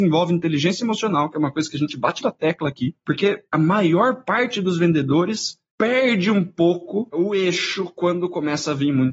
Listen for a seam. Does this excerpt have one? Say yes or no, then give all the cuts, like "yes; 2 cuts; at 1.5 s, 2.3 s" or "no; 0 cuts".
yes; 1 cut; at 2.2 s